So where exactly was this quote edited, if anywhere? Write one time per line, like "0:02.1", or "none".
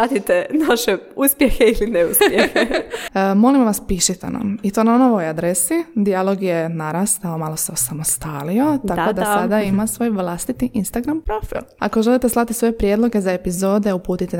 0:03.1